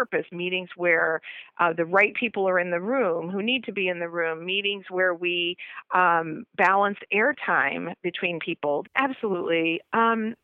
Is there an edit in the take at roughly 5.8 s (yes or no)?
no